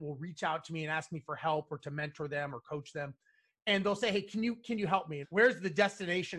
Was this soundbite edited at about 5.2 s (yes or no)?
yes